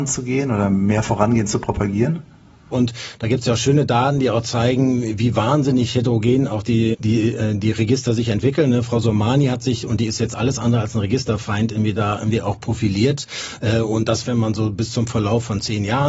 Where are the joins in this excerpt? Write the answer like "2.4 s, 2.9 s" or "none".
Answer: 2.7 s, 6.9 s, 14.2 s

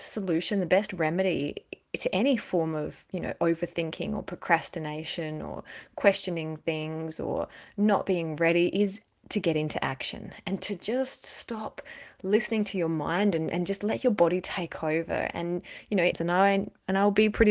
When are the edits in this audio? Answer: 16.1 s

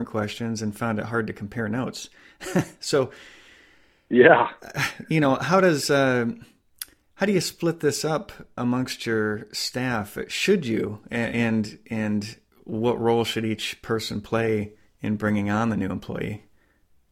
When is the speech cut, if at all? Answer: 8.6 s

